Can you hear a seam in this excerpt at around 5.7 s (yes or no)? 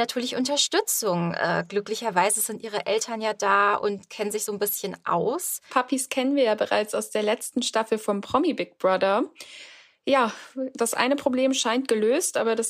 yes